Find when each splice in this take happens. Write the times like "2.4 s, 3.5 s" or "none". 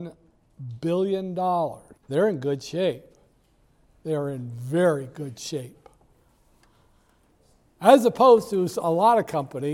2.0 s

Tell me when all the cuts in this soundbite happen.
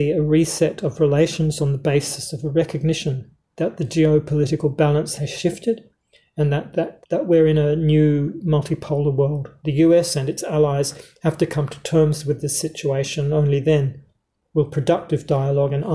7.0 s

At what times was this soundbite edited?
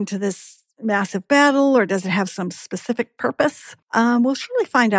3.8 s

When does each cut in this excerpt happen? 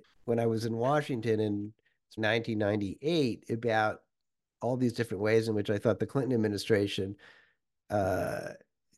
2.2 s

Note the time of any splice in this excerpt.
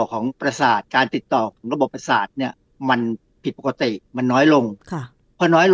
none

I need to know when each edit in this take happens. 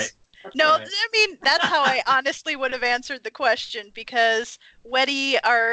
none

